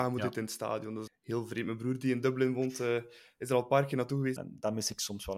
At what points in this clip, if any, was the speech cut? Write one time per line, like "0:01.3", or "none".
0:01.1
0:04.4